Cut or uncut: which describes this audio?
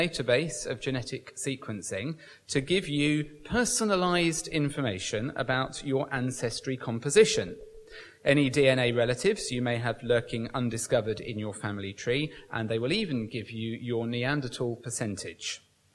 uncut